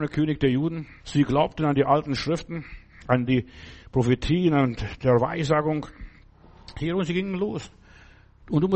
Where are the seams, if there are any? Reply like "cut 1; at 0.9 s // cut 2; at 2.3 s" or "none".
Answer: cut 1; at 1.0 s

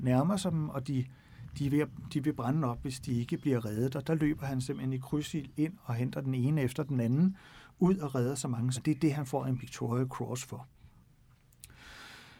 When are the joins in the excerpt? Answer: cut 1; at 4.0 s // cut 2; at 8.7 s

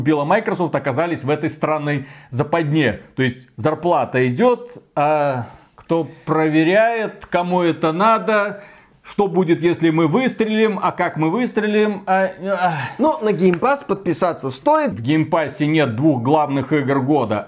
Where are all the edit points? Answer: cut 1; at 14.9 s

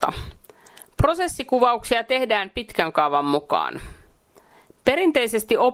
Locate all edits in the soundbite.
none

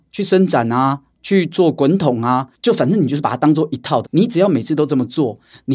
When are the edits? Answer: cut 1; at 4.0 s

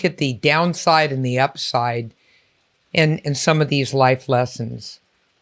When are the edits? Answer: none

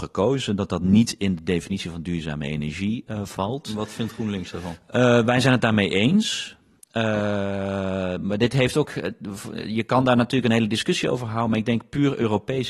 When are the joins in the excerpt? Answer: none

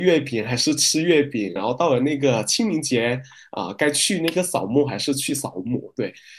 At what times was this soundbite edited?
cut 1; at 1.6 s

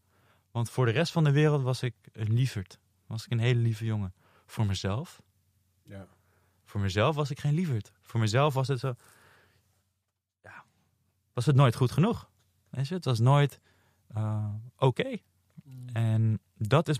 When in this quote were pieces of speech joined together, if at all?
none

